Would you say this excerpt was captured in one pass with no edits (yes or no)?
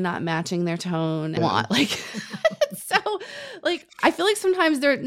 no